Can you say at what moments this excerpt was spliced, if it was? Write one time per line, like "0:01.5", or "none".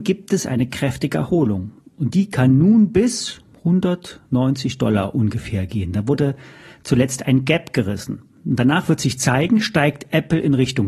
none